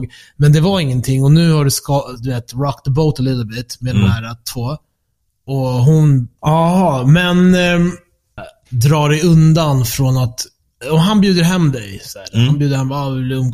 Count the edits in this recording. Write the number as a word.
two